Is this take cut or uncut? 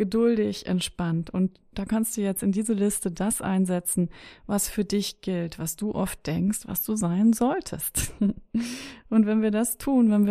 uncut